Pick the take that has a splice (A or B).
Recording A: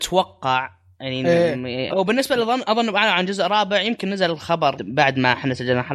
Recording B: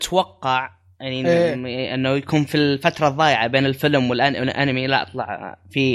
A